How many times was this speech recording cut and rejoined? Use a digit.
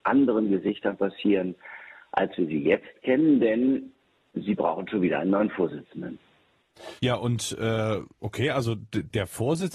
1